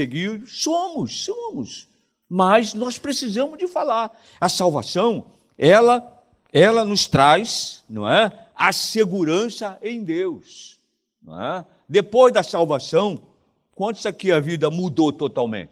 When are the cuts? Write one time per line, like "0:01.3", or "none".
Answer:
none